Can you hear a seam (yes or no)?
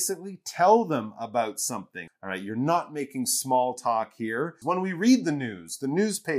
yes